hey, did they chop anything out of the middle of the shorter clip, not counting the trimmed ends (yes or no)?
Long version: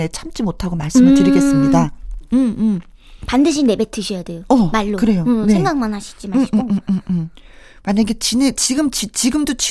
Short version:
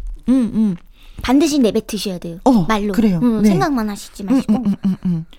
no